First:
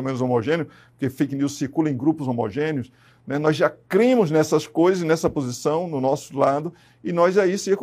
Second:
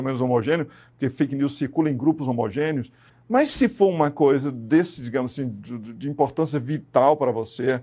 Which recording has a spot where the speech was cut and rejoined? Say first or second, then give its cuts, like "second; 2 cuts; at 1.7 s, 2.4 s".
second; 1 cut; at 3.1 s